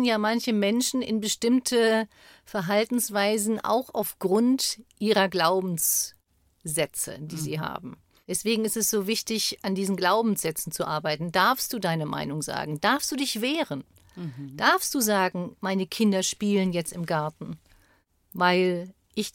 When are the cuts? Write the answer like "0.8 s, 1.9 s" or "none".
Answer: none

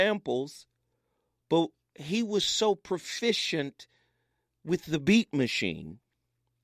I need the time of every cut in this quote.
none

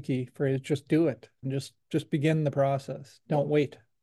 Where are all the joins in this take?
1.4 s

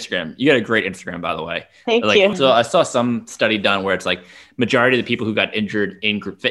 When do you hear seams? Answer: 2.3 s

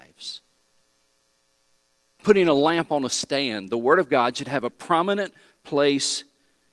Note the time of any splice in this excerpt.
2.2 s

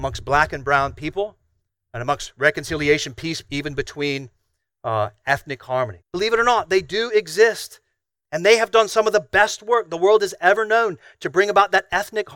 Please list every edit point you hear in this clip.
6.0 s

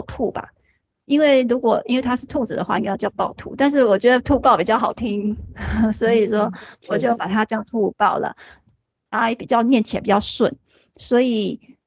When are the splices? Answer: none

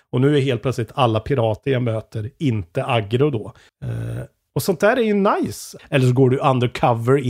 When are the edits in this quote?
3.7 s, 5.8 s

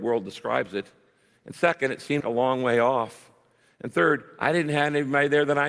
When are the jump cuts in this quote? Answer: 2.2 s

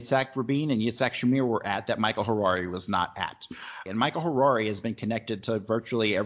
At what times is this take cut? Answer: 3.9 s

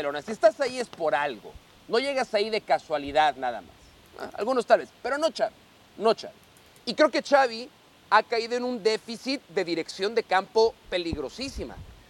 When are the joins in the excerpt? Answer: none

